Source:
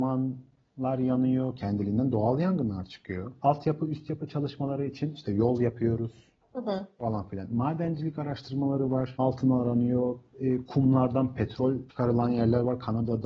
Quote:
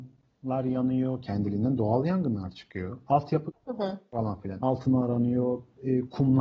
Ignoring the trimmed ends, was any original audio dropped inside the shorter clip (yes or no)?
yes